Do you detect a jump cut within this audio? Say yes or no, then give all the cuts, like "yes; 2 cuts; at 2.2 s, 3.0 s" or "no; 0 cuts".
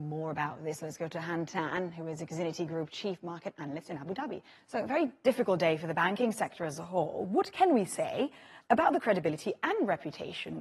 yes; 1 cut; at 4.6 s